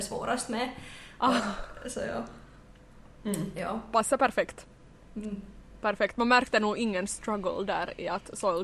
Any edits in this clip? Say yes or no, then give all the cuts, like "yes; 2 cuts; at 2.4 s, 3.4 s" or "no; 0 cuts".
no; 0 cuts